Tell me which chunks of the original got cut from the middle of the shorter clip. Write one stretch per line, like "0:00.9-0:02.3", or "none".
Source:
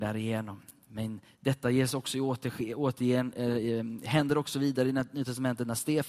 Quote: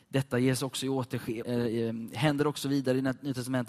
0:02.7-0:03.3